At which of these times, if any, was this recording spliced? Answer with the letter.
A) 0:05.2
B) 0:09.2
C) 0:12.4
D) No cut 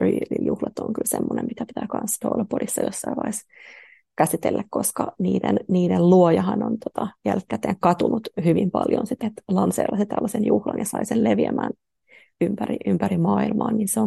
B